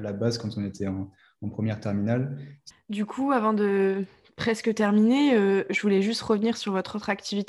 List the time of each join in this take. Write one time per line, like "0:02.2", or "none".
0:02.7